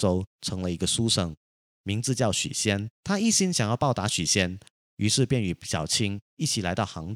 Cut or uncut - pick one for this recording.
cut